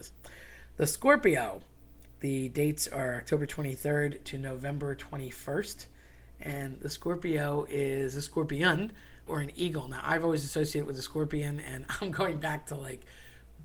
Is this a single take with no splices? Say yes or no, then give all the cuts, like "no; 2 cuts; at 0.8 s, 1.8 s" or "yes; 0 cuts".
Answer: no; 1 cut; at 9.3 s